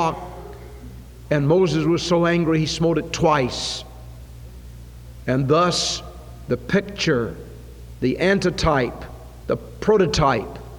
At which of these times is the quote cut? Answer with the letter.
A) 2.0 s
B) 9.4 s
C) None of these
B